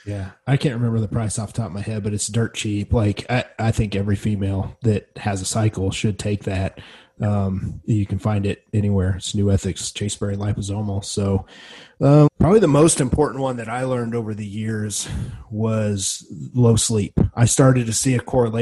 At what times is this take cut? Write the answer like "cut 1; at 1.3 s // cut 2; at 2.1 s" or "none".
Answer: cut 1; at 12.3 s